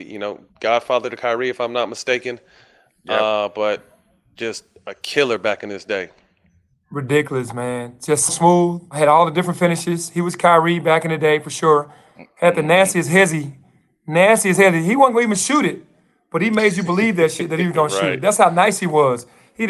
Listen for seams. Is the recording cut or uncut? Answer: cut